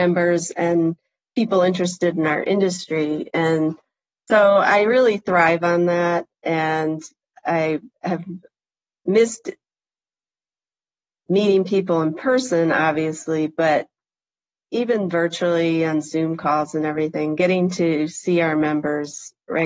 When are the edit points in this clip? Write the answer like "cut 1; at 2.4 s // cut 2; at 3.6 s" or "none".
none